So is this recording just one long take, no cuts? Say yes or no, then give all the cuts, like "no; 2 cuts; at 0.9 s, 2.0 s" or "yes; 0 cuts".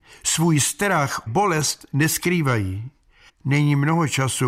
no; 2 cuts; at 1.3 s, 3.3 s